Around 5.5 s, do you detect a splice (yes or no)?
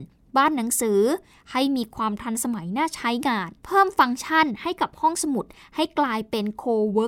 no